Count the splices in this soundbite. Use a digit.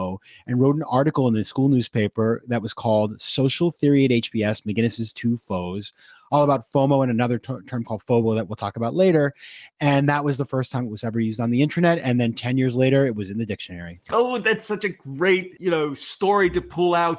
0